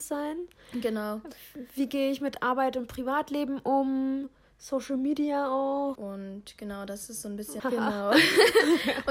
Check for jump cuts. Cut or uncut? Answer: cut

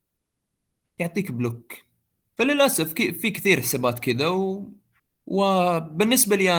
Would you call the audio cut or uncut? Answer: uncut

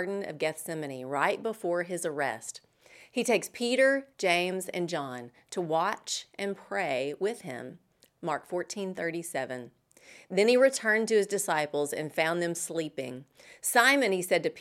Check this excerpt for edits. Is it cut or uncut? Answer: uncut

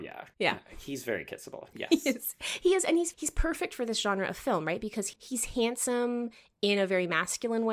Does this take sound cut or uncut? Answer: cut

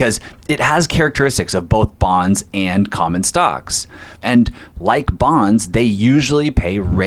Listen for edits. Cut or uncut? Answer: cut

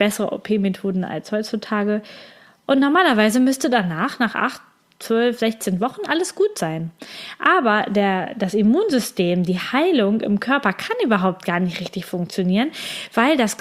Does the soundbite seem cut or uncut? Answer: uncut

